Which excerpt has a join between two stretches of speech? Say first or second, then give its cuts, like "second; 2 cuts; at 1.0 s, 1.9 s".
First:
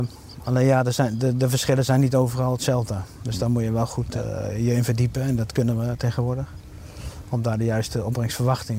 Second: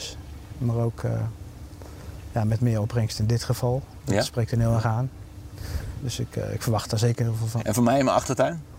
second; 2 cuts; at 6.0 s, 7.6 s